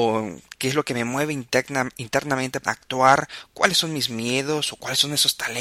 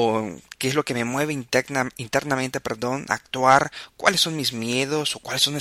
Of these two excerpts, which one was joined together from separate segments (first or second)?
first